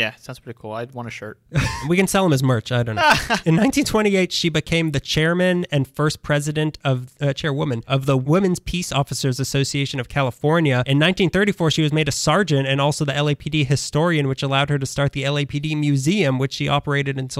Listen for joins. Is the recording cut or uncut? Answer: uncut